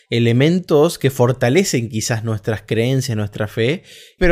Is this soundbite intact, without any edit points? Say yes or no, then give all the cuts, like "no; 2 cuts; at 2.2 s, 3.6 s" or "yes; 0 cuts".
yes; 0 cuts